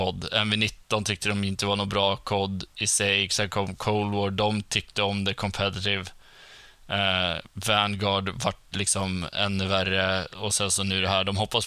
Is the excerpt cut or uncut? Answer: uncut